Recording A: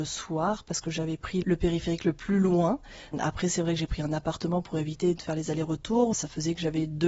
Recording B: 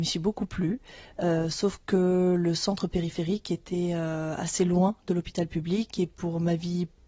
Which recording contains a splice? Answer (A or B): A